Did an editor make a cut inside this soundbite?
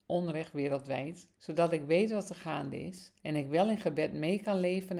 yes; 2 cuts; at 1.3 s, 3.2 s

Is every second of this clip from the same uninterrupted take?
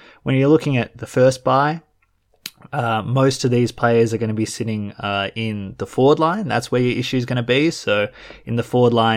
yes; 0 cuts

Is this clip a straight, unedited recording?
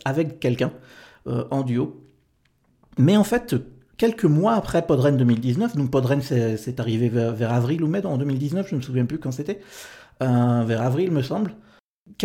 yes; 0 cuts

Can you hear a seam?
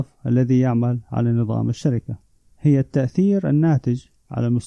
yes; 1 cut; at 2.5 s

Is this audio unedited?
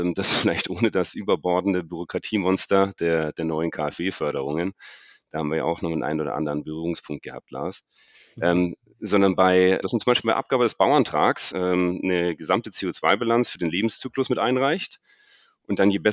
no; 2 cuts; at 9.8 s, 11.5 s

